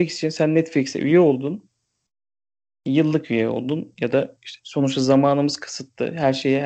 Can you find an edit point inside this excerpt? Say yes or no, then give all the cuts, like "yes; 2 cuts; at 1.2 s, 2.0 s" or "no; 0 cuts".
no; 0 cuts